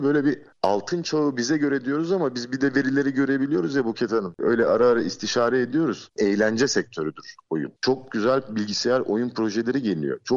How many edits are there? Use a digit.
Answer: 2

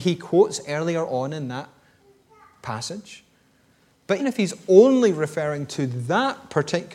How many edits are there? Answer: 1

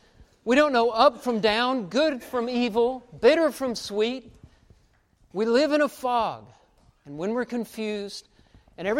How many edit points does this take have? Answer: 0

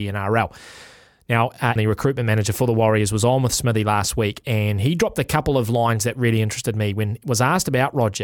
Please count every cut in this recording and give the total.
1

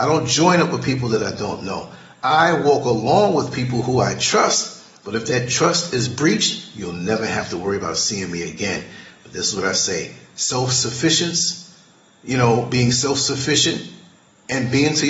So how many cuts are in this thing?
0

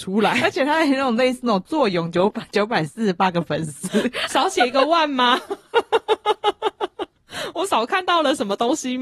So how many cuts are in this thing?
0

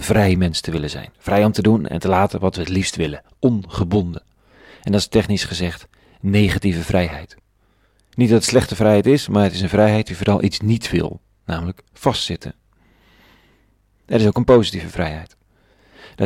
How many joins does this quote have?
0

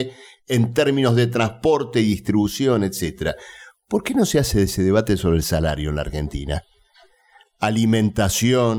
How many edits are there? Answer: 0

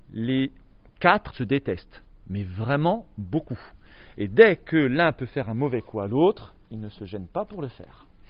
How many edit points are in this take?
1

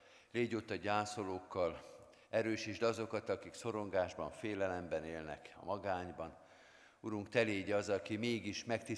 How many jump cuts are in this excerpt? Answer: 2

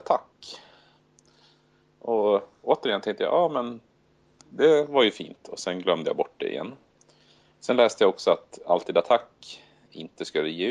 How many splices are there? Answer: 0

